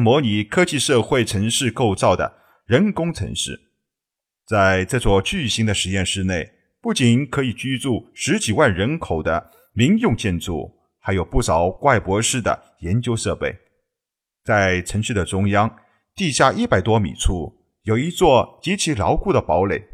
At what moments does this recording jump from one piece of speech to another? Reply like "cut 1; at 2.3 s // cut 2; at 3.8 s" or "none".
none